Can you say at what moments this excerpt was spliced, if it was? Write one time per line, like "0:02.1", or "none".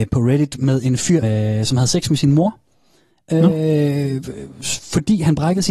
0:01.2